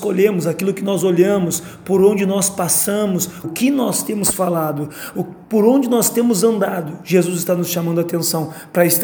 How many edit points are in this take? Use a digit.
1